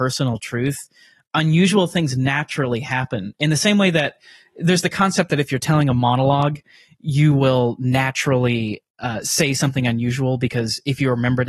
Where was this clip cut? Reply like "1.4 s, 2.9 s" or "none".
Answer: none